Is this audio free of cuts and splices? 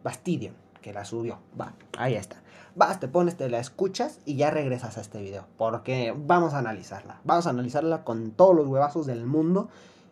yes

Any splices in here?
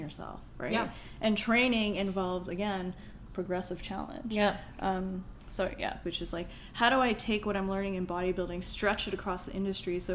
yes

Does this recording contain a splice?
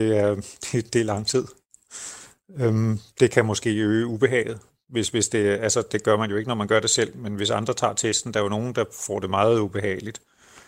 no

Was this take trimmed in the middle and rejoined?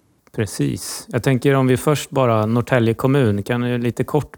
no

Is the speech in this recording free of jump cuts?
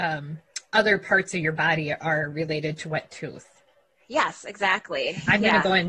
yes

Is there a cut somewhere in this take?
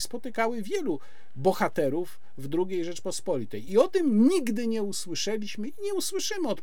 no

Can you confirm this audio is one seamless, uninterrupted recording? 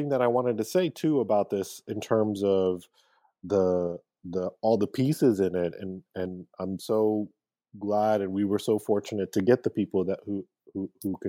yes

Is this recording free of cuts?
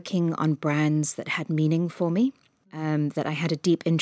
yes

